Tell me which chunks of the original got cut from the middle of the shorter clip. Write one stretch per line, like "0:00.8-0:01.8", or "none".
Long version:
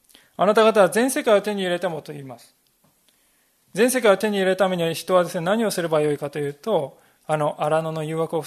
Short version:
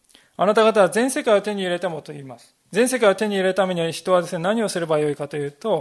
0:02.6-0:03.6

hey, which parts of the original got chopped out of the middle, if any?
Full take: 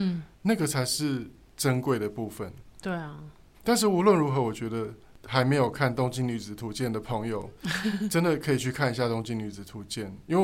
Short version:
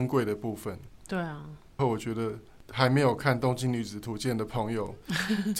0:03.5-0:04.3

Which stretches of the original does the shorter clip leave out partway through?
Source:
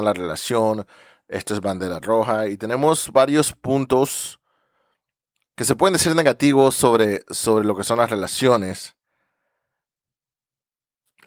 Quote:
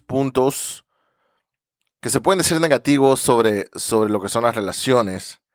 none

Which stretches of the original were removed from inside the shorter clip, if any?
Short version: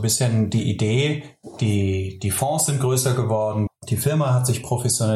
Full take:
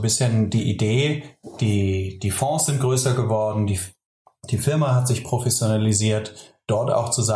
0:03.7-0:04.3

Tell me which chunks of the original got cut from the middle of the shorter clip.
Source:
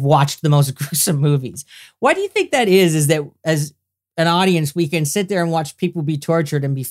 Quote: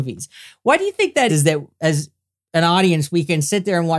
0:02.7-0:02.9

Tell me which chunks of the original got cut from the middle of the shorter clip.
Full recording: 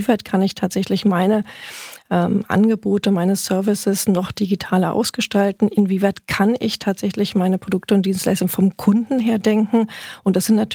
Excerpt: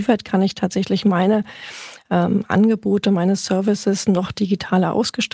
none

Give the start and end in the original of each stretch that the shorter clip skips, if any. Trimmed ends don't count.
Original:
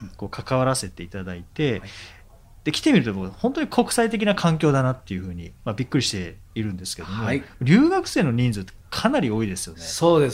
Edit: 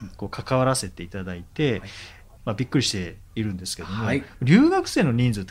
0:02.4-0:05.6

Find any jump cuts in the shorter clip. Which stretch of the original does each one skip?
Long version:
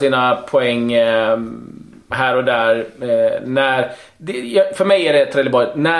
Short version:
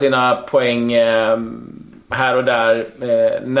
none

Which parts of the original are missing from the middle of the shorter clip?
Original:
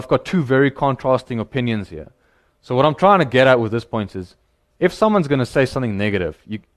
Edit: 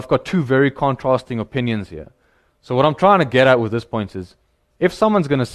none

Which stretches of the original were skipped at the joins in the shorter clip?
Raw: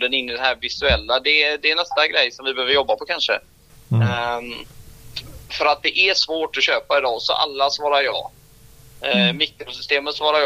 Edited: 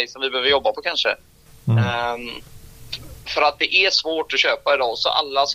none

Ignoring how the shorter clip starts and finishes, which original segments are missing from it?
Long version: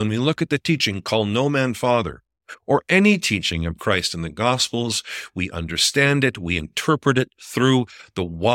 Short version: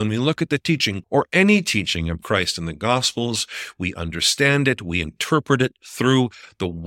0:01.0-0:02.6

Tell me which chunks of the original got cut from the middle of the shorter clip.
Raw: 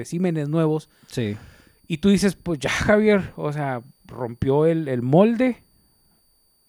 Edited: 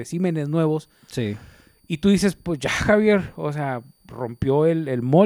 none

